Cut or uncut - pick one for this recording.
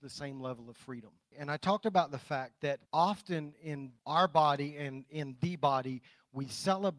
cut